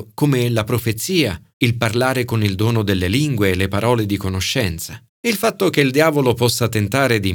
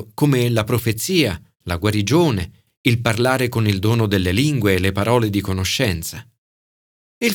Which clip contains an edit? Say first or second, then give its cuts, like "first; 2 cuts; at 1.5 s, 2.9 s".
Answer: first; 2 cuts; at 1.5 s, 5.1 s